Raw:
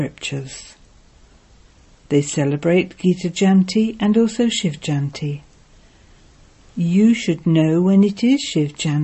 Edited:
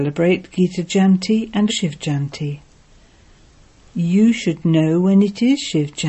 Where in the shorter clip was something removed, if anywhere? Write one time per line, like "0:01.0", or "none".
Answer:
0:01.7